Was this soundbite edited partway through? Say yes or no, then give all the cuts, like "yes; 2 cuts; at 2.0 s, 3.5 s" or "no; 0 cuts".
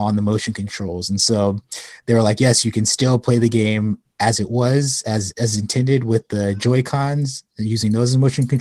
no; 0 cuts